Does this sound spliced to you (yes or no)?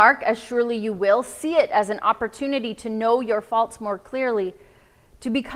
no